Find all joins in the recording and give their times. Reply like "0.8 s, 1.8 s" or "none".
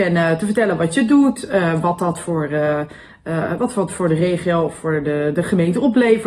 none